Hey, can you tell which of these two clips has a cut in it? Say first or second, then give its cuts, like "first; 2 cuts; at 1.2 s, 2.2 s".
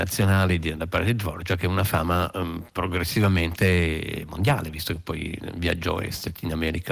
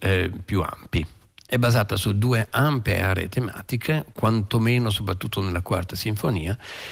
second; 2 cuts; at 1.5 s, 4.1 s